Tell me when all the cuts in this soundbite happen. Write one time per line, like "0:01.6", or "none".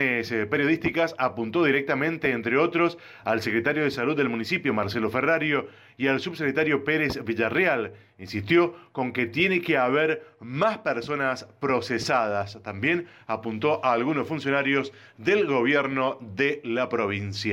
none